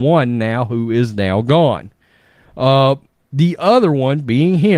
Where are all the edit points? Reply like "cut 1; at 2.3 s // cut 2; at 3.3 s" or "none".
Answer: none